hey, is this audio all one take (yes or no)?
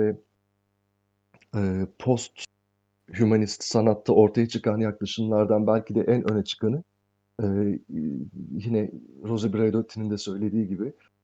yes